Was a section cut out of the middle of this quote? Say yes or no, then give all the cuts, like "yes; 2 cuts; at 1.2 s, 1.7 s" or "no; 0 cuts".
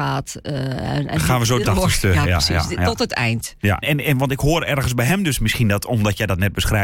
yes; 2 cuts; at 1.6 s, 3.8 s